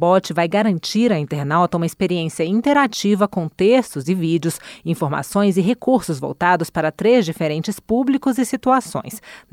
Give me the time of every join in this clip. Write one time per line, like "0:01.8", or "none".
none